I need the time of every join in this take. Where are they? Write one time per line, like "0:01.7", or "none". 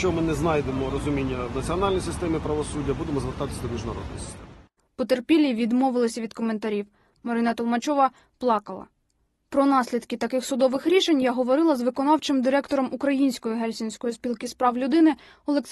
none